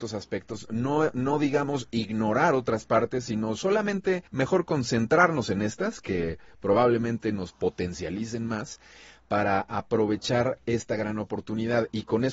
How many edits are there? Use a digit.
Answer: 1